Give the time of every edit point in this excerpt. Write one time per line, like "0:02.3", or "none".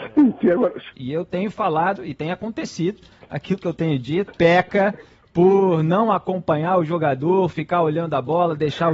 0:00.9
0:02.0
0:04.3